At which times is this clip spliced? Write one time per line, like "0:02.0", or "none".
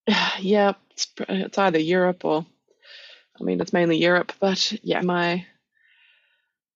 0:05.0